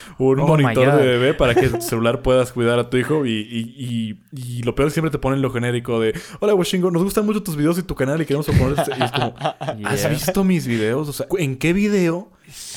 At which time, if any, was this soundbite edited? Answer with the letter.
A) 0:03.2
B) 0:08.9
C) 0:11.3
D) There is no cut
C